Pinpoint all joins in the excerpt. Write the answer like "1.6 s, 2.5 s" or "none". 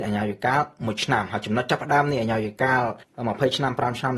3.0 s